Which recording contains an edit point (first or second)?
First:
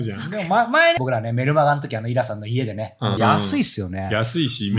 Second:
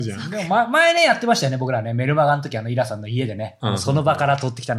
first